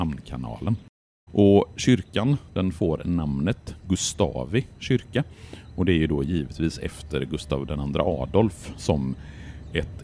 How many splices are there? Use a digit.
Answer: 1